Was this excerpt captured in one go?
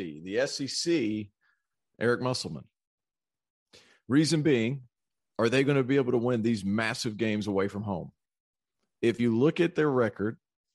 yes; 0 cuts

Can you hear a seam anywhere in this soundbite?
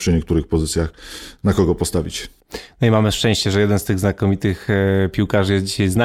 no; 0 cuts

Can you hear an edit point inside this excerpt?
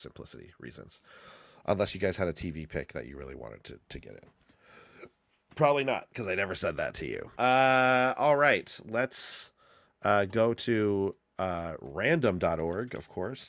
yes; 1 cut; at 7.4 s

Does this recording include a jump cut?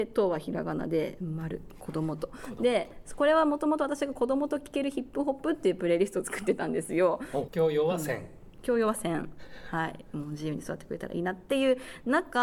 yes; 1 cut; at 7.5 s

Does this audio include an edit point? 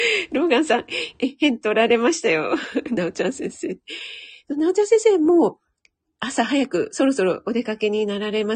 no; 0 cuts

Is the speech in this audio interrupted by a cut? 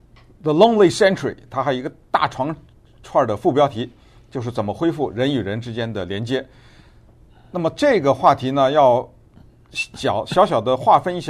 no; 0 cuts

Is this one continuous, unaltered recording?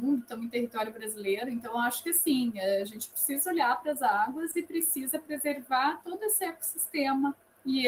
yes; 0 cuts

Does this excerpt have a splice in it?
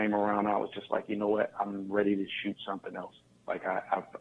no; 0 cuts

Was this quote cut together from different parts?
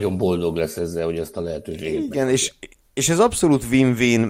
no; 0 cuts

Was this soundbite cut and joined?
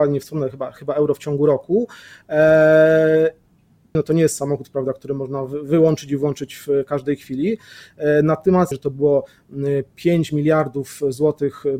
yes; 2 cuts; at 3.9 s, 8.7 s

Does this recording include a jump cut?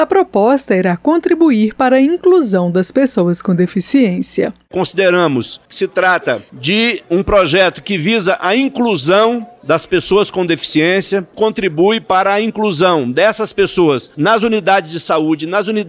no; 0 cuts

